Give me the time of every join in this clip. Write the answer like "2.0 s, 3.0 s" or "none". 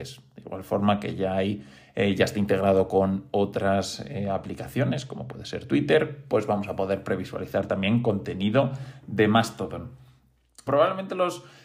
10.7 s